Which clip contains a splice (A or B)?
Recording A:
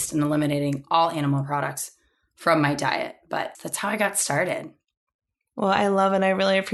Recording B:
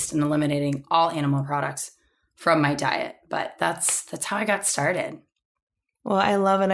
A